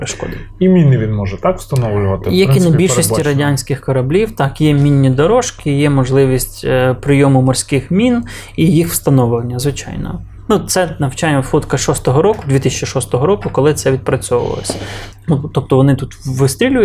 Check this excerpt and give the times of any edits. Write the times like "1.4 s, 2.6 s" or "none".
15.1 s